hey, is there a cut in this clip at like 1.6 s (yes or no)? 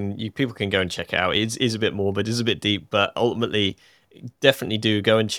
no